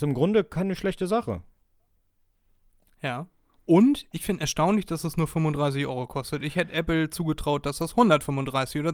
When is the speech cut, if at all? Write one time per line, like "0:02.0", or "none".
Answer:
none